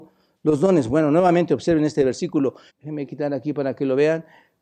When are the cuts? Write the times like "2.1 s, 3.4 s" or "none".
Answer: 2.7 s

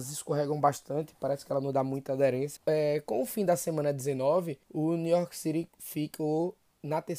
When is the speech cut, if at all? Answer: 2.6 s, 4.6 s

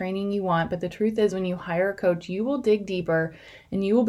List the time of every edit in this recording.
none

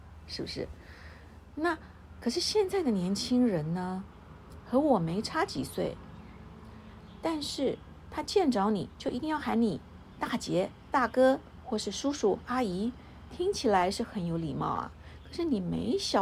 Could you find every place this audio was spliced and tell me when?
none

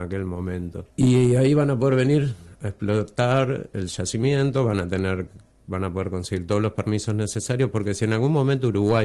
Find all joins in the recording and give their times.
0.9 s

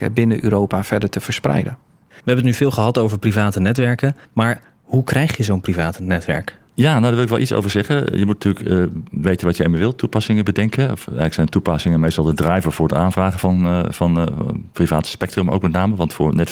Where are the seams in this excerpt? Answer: none

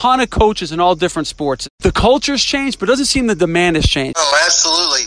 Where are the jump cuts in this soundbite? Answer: 4.1 s

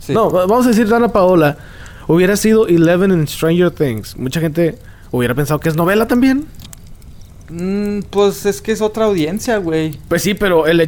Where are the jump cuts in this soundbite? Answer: 6.6 s

